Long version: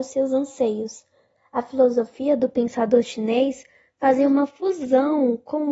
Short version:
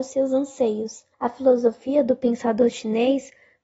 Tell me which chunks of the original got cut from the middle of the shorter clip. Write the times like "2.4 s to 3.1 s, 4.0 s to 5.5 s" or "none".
1.1 s to 1.5 s